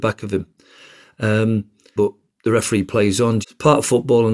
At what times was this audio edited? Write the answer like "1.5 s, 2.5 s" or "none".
2.0 s, 3.4 s